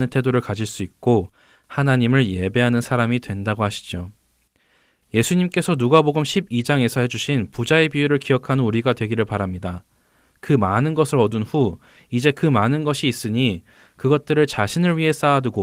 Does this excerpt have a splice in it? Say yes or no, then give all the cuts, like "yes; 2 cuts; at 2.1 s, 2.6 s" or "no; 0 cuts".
no; 0 cuts